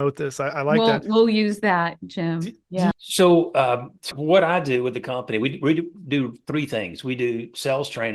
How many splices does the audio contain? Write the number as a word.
two